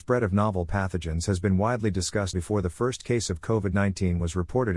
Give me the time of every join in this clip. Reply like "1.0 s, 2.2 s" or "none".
2.3 s